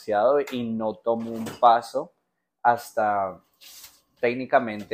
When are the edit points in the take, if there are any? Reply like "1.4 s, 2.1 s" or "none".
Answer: none